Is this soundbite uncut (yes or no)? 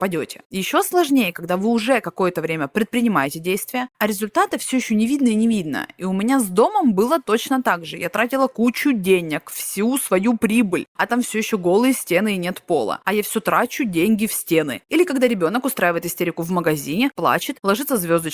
no